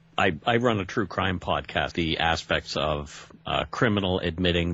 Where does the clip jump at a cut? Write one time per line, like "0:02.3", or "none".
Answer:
0:01.9